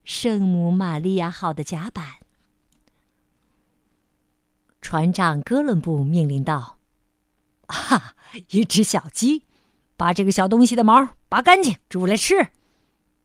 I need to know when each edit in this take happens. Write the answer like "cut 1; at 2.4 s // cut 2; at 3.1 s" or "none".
cut 1; at 9.8 s // cut 2; at 11.8 s